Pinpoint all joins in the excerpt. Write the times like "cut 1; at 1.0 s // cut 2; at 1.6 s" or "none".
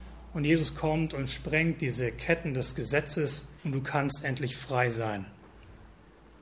cut 1; at 3.6 s